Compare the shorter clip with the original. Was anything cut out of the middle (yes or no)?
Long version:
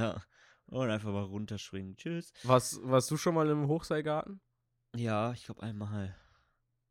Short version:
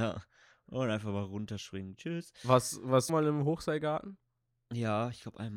yes